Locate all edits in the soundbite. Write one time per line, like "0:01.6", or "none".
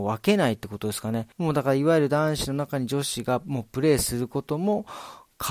0:01.3

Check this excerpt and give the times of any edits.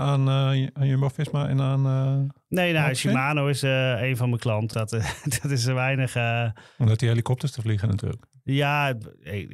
0:04.7

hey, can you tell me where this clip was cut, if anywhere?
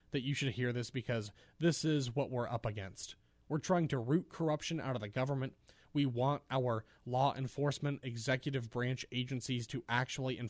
none

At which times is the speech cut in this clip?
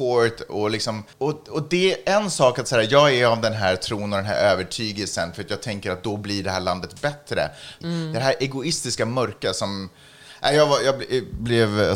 0:01.1
0:07.8

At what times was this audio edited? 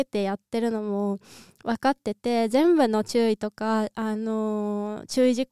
none

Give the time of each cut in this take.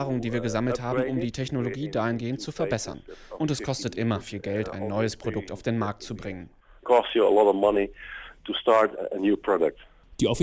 0:06.8

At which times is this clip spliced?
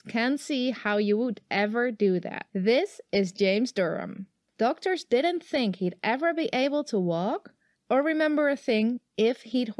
0:02.5
0:04.5
0:07.8

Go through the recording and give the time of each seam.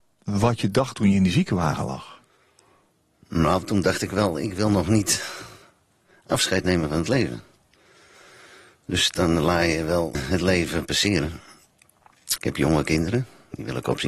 0:10.1
0:12.4

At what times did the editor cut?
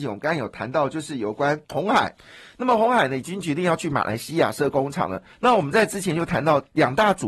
0:01.6
0:05.3

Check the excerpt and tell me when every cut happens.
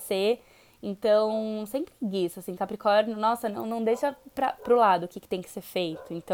none

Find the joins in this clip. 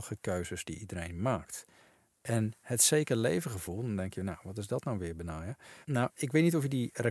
0:05.8

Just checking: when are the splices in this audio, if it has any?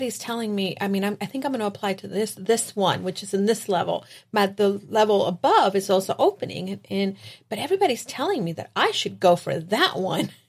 none

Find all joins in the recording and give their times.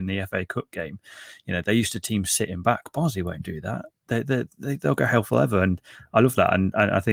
none

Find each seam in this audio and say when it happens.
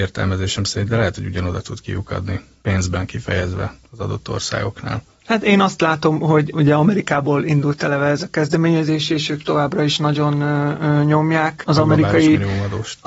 none

